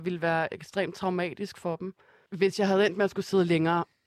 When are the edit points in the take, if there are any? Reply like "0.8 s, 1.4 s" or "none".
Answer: 2.3 s